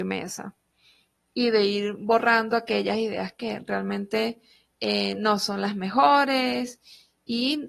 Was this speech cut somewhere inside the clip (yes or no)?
yes